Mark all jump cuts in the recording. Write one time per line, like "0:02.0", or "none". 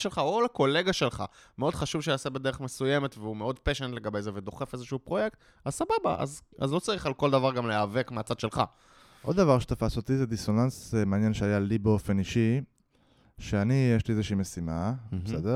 none